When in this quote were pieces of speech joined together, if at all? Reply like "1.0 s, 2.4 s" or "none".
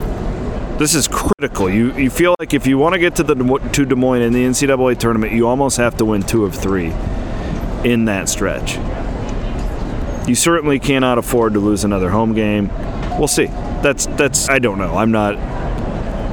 13.1 s, 14.5 s